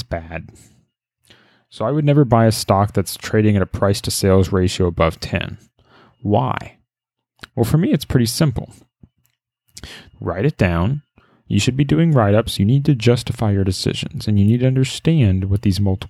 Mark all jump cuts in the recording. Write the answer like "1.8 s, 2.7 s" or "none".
10.1 s, 12.6 s